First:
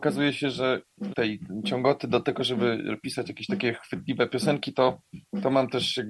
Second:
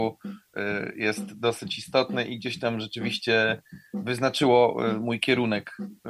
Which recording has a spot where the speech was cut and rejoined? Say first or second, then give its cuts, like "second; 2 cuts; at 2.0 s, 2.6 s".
first; 1 cut; at 1.1 s